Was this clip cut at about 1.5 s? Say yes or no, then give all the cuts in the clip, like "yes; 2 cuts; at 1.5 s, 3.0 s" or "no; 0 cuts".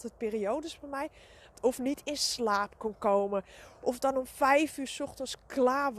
yes; 1 cut; at 1.5 s